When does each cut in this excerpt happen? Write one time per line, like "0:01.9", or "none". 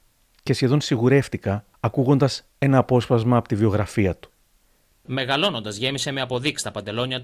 none